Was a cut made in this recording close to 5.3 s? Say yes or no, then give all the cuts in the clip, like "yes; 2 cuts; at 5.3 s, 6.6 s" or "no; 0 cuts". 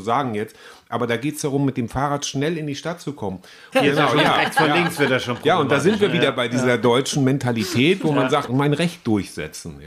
no; 2 cuts; at 3.7 s, 8.5 s